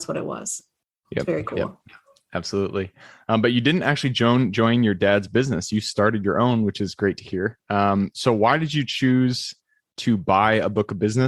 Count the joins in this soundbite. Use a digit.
0